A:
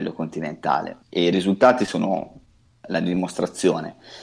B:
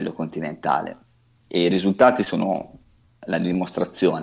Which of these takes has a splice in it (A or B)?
A